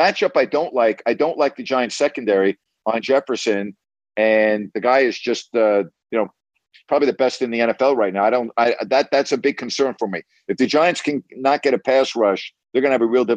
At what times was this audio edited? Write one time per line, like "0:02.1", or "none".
none